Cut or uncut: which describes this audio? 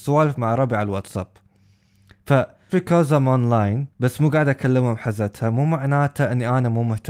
cut